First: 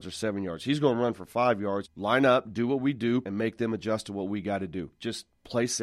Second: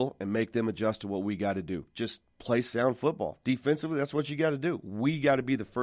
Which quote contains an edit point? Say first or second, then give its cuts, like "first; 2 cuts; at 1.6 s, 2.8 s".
first; 2 cuts; at 1.8 s, 3.2 s